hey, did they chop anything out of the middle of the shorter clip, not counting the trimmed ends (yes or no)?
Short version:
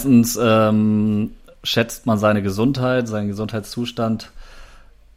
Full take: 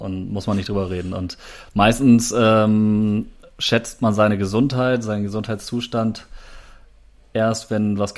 no